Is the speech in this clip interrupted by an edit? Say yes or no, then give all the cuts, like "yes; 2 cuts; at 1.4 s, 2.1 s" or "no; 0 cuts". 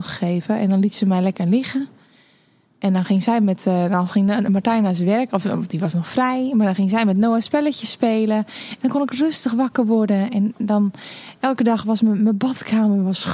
no; 0 cuts